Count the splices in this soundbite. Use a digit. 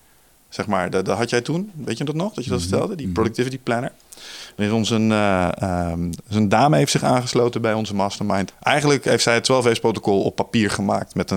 1